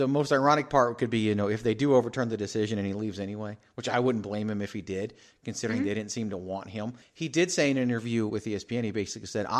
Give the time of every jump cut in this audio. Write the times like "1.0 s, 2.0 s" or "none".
7.0 s, 8.3 s